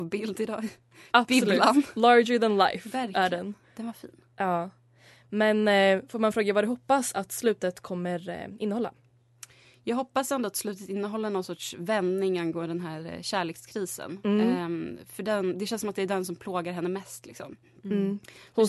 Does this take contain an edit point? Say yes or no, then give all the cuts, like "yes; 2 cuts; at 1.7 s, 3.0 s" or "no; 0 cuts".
no; 0 cuts